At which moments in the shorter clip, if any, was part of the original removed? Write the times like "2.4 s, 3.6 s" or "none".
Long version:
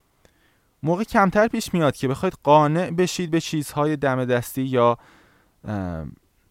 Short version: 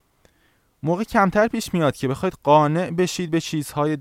none